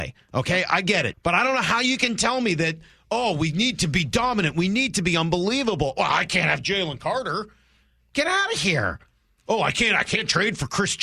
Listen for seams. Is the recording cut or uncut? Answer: cut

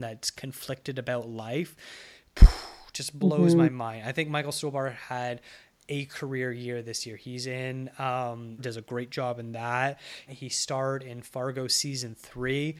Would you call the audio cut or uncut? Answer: cut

